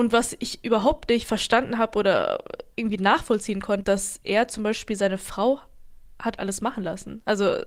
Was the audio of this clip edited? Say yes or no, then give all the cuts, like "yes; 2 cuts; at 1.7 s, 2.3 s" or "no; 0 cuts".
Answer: yes; 1 cut; at 3.8 s